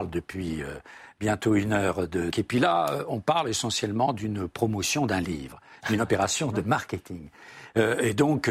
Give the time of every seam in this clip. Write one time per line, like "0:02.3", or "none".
0:02.3